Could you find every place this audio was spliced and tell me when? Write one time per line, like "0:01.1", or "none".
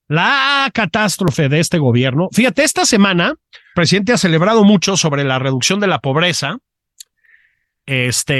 0:03.7